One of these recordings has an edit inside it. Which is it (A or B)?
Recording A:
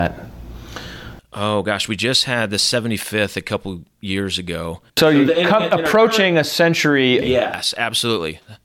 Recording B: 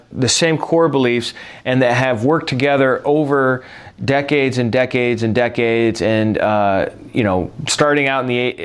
A